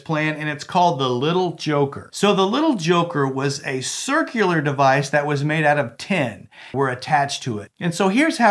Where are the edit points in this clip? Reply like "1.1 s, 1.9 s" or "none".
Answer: 6.7 s

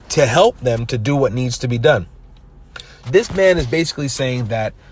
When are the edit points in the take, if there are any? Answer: 3.0 s

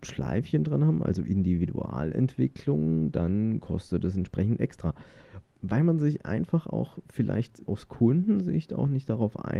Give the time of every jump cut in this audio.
5.5 s, 7.7 s

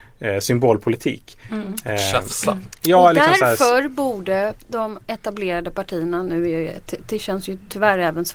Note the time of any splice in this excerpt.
none

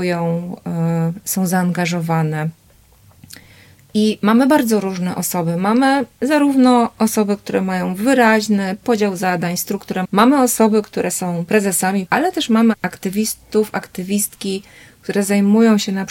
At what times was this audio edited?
10.0 s, 12.1 s

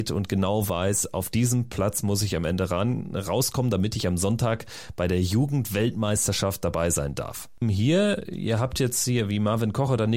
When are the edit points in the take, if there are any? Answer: 7.6 s

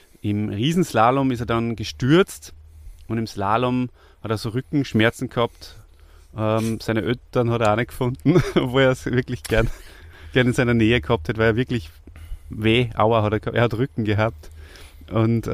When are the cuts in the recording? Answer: none

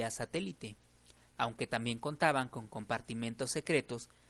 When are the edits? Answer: 1.3 s

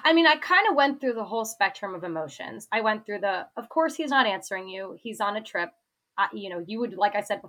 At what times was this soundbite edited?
none

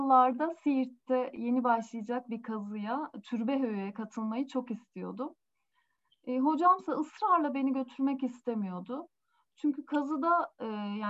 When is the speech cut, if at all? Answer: none

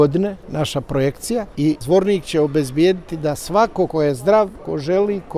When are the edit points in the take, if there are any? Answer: 3.9 s

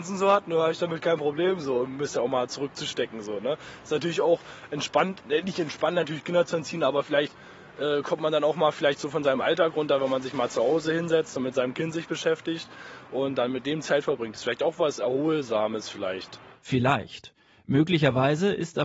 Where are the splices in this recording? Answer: none

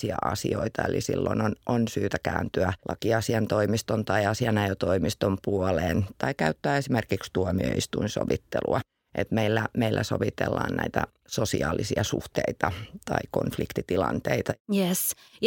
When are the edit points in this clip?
2.8 s

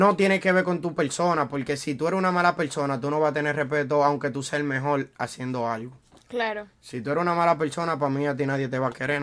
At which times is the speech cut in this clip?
none

